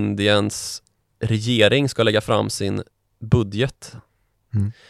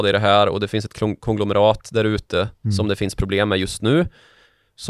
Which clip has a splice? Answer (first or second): second